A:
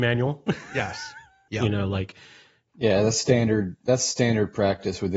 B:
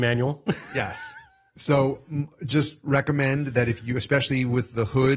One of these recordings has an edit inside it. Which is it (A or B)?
A